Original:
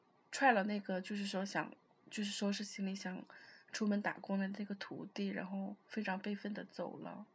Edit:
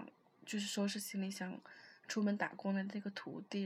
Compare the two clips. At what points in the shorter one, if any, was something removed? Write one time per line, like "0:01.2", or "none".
none